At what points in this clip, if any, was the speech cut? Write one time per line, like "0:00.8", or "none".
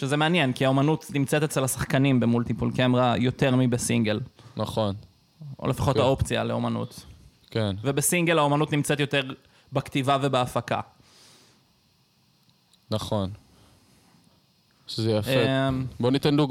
none